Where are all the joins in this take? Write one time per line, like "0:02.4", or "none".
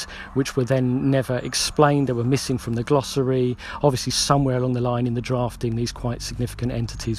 none